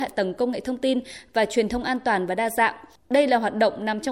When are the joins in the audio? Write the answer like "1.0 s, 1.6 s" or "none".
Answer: none

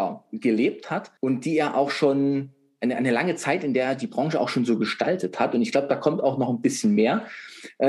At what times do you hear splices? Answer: 1.2 s

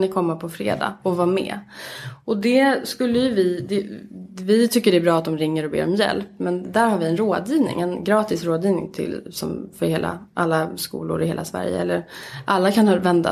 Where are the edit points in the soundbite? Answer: none

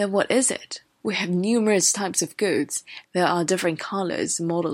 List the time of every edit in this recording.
1.0 s, 3.0 s

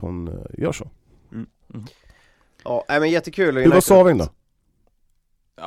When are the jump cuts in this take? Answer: none

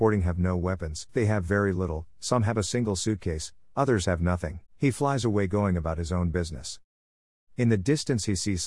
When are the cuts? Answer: 1.1 s, 4.7 s

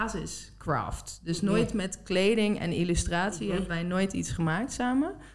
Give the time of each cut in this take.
none

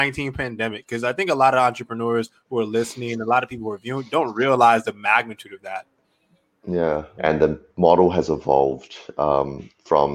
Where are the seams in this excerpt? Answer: 7.2 s

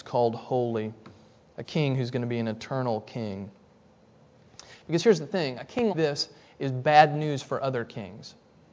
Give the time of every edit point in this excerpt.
5.9 s

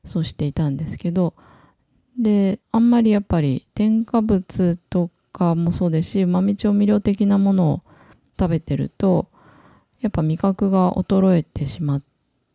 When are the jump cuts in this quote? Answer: 2.6 s

